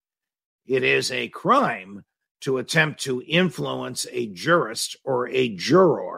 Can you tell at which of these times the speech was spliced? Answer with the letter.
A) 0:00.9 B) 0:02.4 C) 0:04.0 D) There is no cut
D